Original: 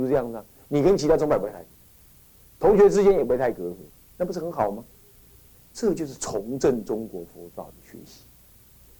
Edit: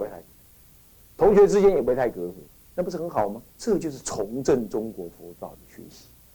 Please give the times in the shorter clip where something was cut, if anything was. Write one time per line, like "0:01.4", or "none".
0:03.5